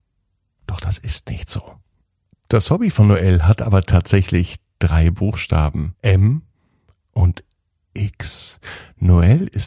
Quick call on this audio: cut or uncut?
cut